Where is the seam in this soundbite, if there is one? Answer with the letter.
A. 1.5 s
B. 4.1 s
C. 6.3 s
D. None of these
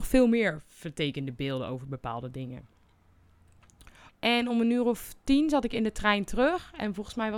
B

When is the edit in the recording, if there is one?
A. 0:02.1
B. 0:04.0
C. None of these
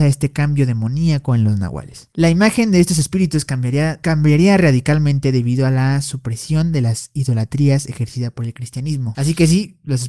A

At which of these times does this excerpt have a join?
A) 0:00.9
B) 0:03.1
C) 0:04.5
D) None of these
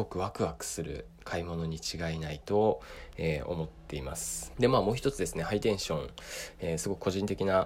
C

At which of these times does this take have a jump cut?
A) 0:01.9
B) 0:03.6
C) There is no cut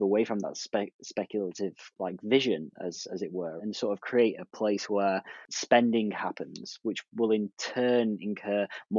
B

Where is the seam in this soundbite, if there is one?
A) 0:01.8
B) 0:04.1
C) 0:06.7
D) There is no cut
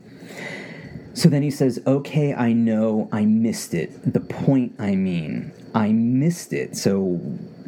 D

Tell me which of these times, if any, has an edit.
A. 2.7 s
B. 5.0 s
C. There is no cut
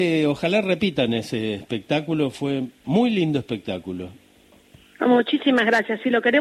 C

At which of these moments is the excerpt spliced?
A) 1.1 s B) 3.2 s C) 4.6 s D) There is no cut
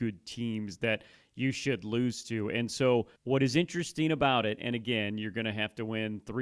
B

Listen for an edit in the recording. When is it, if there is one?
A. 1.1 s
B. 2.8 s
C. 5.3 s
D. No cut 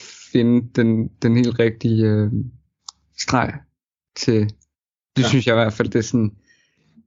D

